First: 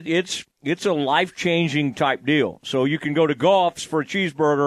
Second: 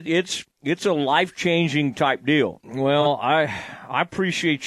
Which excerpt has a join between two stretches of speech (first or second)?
second